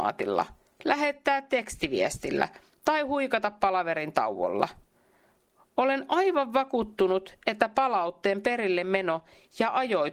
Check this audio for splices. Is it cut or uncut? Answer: uncut